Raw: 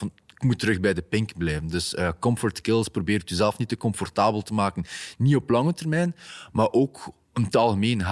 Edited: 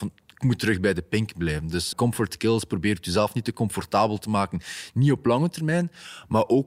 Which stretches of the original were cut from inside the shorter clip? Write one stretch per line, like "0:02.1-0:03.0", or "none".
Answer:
0:01.9-0:02.2